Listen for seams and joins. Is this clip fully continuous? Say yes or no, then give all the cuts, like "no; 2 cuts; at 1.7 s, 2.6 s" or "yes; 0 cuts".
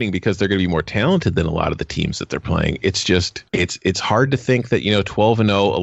no; 1 cut; at 3.5 s